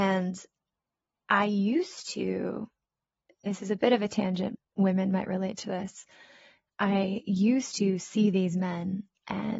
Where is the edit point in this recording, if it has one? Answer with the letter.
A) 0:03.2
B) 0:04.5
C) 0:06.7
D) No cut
B